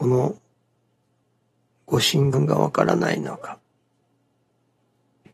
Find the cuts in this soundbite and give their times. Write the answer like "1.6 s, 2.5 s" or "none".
2.3 s